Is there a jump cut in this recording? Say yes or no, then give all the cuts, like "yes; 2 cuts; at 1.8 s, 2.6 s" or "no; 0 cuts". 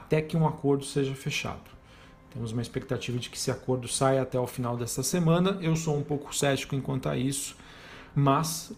no; 0 cuts